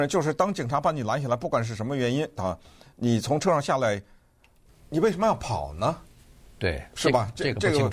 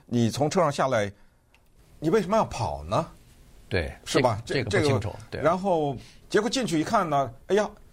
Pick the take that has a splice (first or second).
second